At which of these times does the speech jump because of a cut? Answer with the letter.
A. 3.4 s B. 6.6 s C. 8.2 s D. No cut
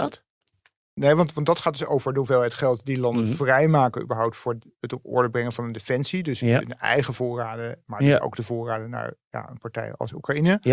D